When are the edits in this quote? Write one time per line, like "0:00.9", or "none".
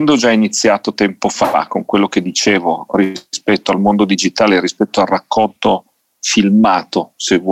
none